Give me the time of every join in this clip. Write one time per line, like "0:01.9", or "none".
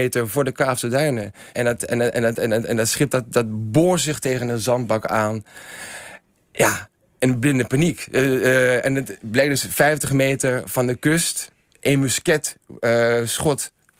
0:01.5